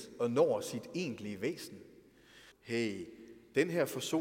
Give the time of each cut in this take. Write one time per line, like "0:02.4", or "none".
0:02.5